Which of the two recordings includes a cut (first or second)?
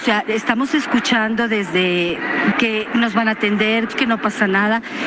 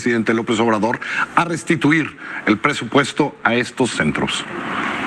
first